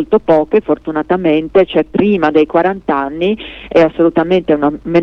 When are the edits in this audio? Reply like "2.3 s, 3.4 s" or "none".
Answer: none